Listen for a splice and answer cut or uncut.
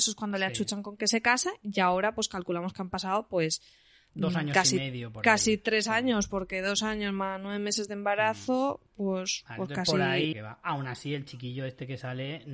cut